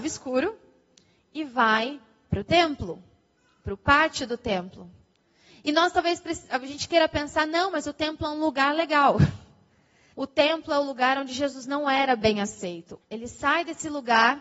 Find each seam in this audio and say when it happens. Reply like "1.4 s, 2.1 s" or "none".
10.1 s, 13.0 s